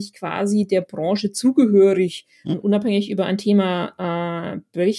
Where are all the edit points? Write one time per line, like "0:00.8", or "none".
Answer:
0:02.5